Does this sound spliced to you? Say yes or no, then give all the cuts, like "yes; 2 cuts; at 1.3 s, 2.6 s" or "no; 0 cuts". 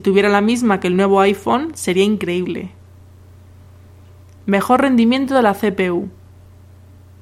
no; 0 cuts